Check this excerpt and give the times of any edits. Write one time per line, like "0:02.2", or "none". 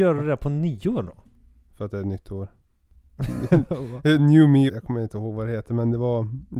0:04.7